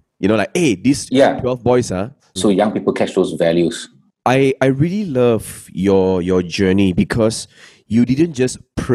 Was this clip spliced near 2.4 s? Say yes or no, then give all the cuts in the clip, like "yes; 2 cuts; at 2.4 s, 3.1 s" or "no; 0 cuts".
yes; 1 cut; at 2.4 s